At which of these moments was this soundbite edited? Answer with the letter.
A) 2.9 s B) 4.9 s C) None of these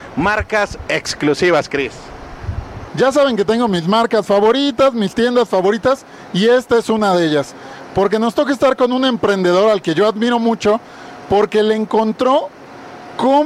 A